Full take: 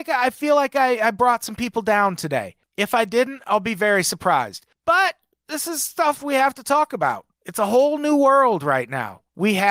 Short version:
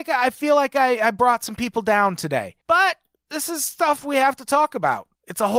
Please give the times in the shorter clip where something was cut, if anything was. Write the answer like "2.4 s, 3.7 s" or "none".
2.6 s

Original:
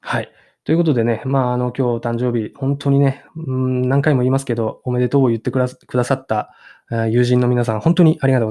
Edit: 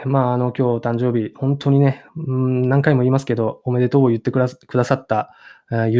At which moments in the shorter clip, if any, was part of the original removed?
none

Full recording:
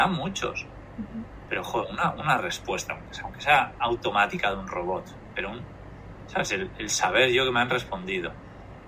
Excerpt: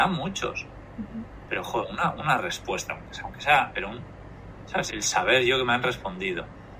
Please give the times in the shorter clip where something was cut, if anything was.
3.7 s, 4.9 s

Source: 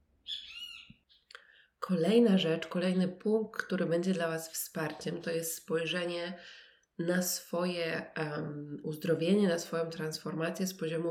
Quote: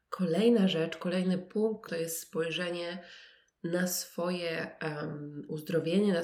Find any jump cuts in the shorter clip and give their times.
1.9 s

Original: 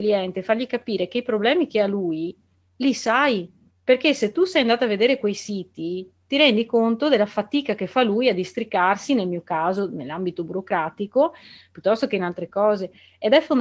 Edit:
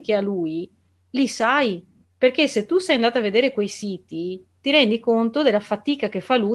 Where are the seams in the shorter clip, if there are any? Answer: none

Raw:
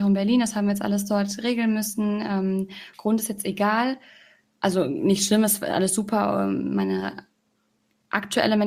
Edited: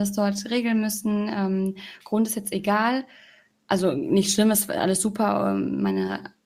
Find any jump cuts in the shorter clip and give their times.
none

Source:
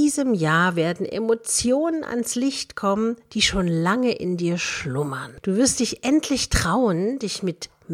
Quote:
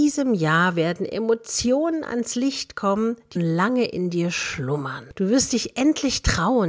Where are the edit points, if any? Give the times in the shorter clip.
3.4 s

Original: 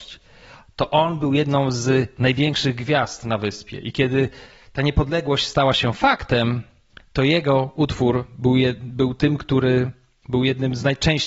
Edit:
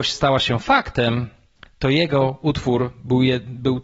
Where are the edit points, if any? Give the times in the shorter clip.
none

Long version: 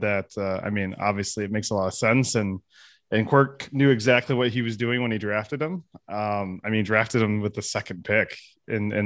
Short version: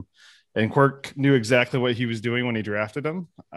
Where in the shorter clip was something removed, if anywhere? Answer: none

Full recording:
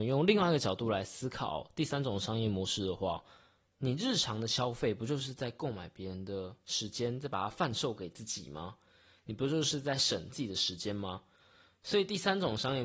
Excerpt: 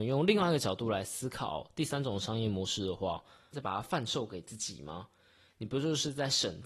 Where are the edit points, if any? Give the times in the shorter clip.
3.5 s

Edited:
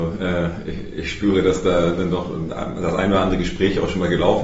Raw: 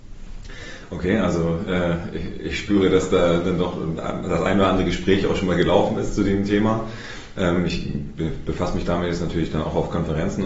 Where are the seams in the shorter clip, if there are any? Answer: none

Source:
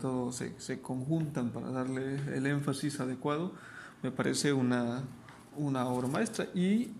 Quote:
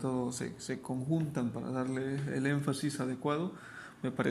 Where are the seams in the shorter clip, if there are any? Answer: none

